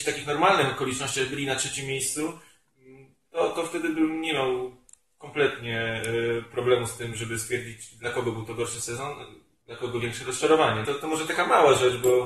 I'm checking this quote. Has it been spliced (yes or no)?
yes